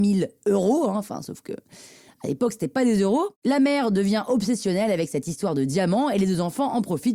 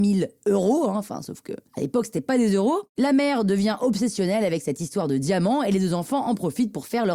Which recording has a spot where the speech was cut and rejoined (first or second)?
second